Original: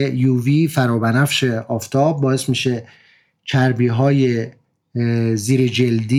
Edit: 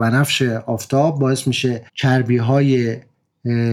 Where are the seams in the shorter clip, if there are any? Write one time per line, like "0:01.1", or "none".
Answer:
0:01.9